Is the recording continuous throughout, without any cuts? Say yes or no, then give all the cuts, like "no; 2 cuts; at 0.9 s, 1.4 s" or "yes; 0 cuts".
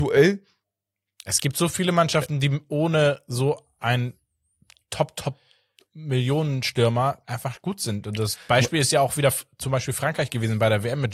yes; 0 cuts